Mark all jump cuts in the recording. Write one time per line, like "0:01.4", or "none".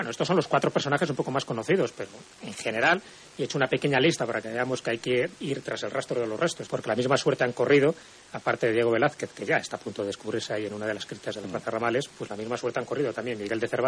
0:06.7